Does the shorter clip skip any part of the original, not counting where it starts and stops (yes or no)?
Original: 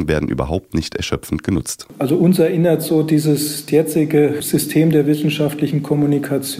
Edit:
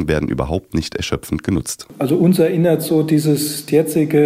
no